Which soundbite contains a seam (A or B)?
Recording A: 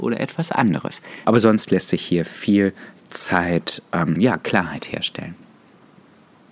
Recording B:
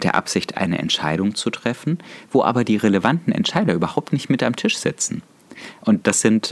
A